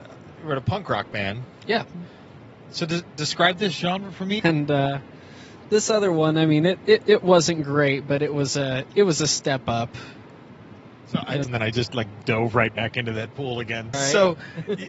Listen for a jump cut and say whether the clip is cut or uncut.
cut